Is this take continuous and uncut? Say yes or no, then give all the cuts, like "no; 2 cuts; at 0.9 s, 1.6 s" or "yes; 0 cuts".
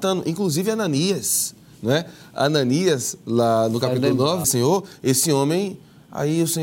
no; 1 cut; at 4.4 s